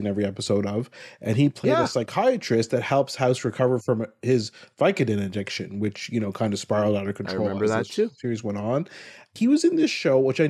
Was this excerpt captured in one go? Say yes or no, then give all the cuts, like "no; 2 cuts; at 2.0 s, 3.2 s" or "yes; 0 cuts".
yes; 0 cuts